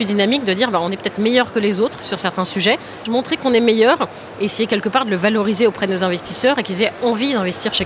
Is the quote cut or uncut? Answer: cut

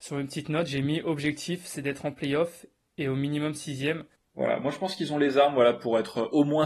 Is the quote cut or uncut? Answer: cut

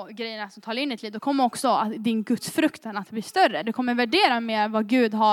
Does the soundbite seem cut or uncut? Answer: uncut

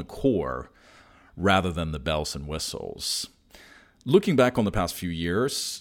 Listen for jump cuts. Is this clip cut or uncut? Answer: uncut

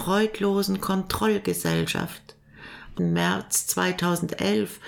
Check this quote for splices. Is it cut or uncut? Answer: cut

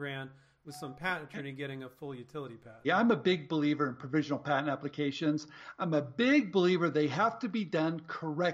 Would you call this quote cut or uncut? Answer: cut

